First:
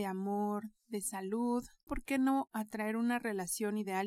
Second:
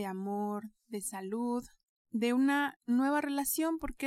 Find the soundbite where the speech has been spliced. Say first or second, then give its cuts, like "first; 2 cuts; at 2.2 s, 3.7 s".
first; 1 cut; at 1.9 s